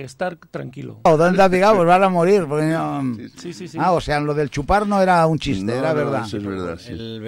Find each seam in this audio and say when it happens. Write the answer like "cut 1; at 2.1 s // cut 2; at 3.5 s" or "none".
cut 1; at 1.1 s